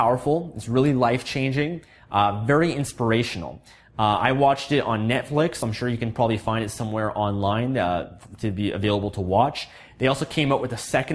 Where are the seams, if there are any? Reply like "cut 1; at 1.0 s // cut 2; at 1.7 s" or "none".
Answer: none

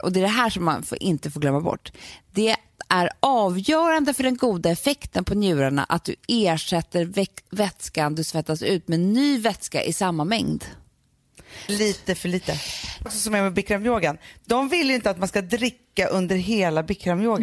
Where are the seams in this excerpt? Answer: cut 1; at 11.7 s // cut 2; at 13.1 s

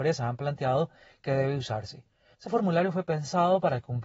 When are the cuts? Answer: cut 1; at 2.3 s

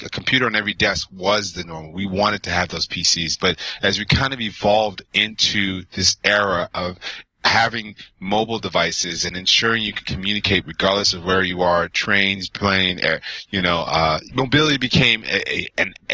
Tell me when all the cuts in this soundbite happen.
cut 1; at 14.3 s

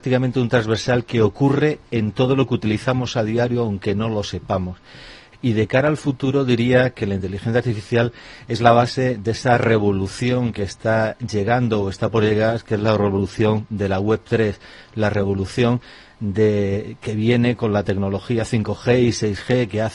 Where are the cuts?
cut 1; at 5.3 s

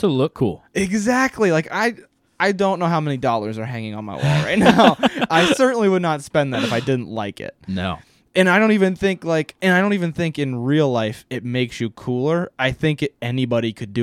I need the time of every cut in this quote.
none

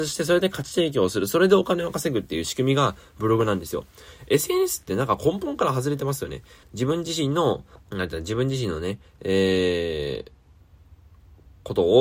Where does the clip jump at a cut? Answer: cut 1; at 6.6 s // cut 2; at 7.8 s

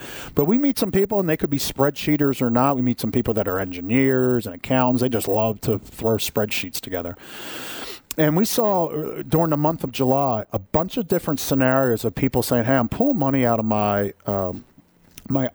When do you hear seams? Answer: none

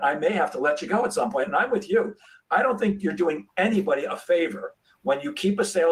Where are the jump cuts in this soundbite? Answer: none

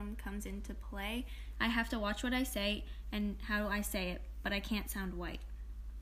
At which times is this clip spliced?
cut 1; at 1.5 s

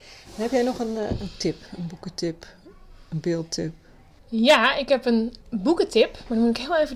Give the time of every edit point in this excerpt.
cut 1; at 4.2 s // cut 2; at 5.4 s

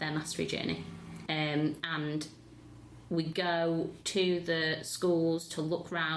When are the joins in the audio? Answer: cut 1; at 1.3 s

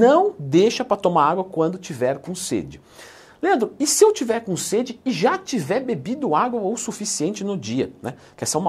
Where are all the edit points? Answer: none

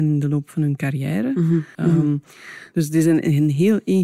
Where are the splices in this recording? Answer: cut 1; at 1.7 s

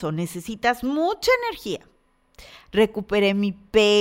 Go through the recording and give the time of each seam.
cut 1; at 2.6 s

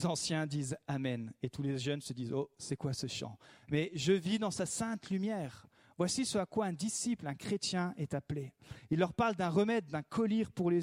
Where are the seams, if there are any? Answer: none

